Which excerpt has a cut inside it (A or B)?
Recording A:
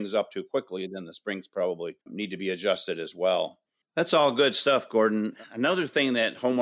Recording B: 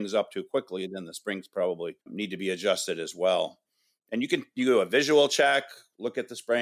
A